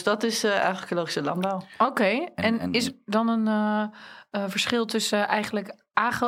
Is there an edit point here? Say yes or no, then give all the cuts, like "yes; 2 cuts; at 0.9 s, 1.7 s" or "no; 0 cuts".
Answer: no; 0 cuts